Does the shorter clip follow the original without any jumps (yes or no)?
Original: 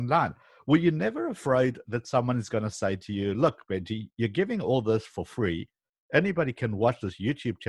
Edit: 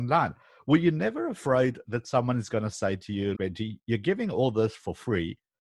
no